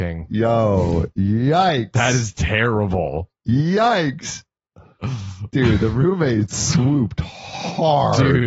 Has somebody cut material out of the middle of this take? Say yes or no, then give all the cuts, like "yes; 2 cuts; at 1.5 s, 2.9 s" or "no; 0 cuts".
no; 0 cuts